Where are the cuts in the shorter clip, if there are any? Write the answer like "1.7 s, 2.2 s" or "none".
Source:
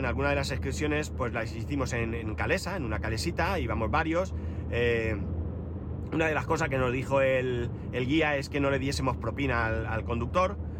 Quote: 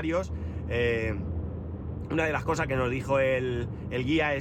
none